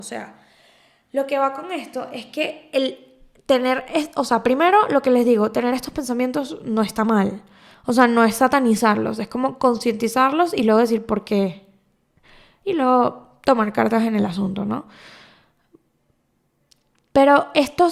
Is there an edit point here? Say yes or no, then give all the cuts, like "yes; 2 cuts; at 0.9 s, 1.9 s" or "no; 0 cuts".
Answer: no; 0 cuts